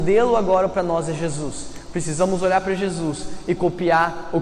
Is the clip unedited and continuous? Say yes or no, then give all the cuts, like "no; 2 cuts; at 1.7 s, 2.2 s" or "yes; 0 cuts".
yes; 0 cuts